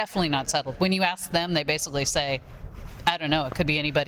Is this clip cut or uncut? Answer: uncut